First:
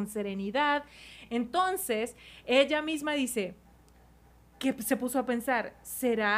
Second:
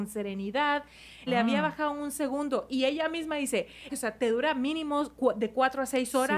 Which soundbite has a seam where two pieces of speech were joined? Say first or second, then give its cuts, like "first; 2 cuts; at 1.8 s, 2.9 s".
second; 2 cuts; at 1.3 s, 3.9 s